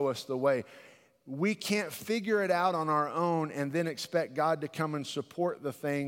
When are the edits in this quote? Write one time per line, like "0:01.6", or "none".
none